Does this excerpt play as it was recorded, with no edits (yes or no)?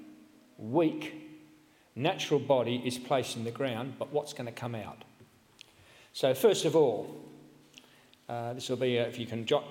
yes